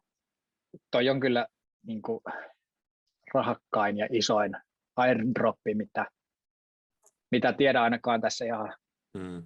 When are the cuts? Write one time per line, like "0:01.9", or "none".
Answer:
none